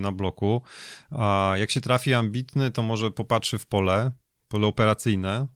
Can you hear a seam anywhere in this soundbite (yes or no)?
no